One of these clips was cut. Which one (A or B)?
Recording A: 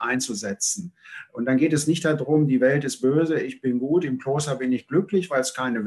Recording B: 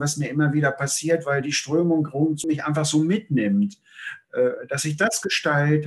B